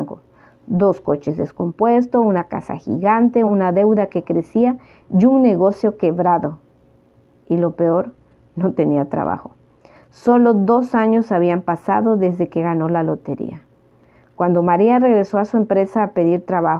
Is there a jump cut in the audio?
yes; 1 cut; at 3.5 s

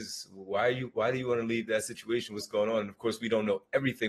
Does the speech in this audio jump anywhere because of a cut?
no; 0 cuts

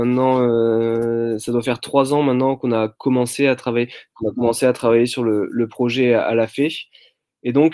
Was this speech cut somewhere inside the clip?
yes; 1 cut; at 4.1 s

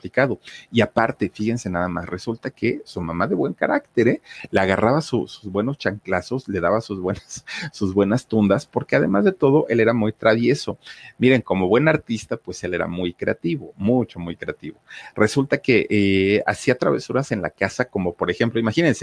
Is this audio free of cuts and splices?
yes; 0 cuts

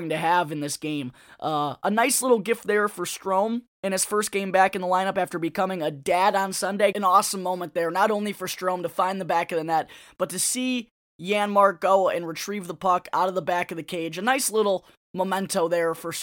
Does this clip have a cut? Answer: yes; 1 cut; at 6.9 s

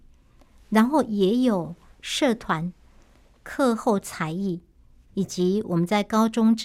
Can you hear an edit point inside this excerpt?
no; 0 cuts

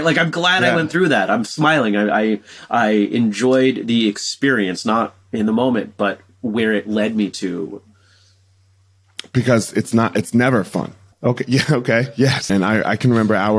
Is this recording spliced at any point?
yes; 2 cuts; at 11.1 s, 12.5 s

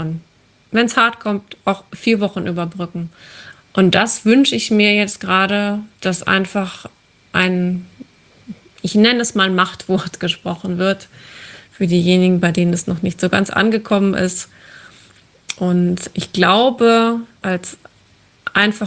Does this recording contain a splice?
yes; 2 cuts; at 3.5 s, 17.4 s

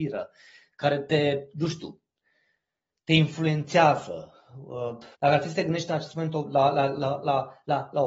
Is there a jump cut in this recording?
yes; 1 cut; at 5.1 s

